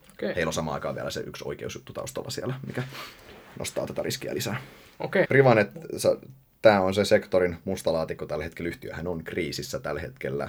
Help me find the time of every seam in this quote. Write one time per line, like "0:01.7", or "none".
0:05.3